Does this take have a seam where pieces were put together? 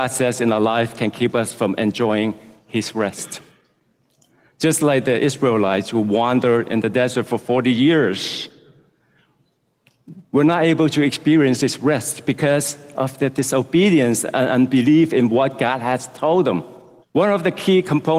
yes; 1 cut; at 17.0 s

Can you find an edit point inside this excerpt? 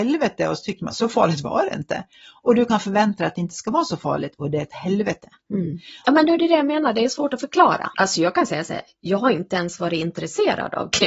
yes; 2 cuts; at 6.0 s, 7.9 s

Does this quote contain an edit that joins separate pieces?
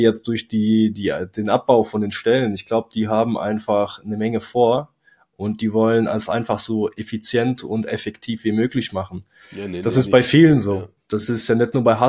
no; 0 cuts

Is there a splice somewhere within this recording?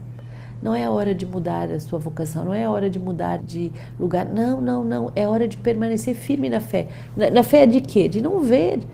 yes; 1 cut; at 3.4 s

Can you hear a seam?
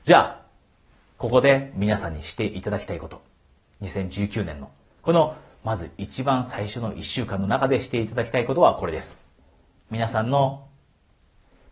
no; 0 cuts

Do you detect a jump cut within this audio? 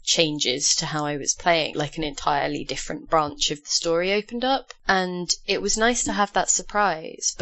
yes; 1 cut; at 1.7 s

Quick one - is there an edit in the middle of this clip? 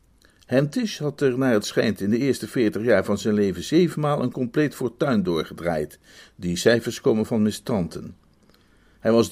no; 0 cuts

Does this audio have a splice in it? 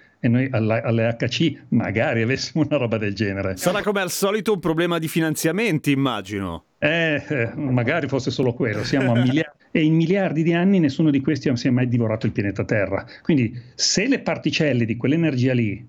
yes; 1 cut; at 9.6 s

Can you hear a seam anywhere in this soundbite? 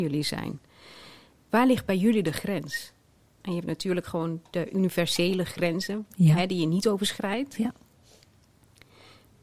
yes; 1 cut; at 1.4 s

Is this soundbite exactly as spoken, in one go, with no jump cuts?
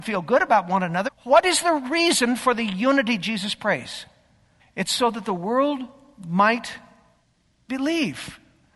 no; 2 cuts; at 1.1 s, 4.6 s

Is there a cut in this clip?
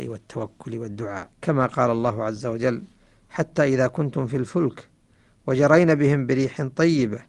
yes; 1 cut; at 1.3 s

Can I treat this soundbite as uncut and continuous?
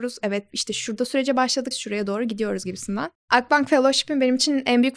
no; 2 cuts; at 1.7 s, 3.2 s

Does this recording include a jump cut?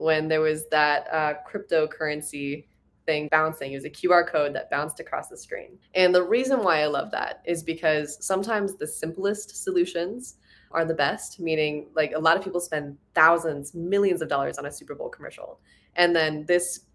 yes; 3 cuts; at 3.3 s, 5.8 s, 10.7 s

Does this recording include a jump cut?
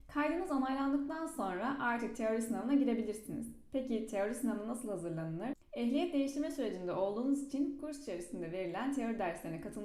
yes; 1 cut; at 5.6 s

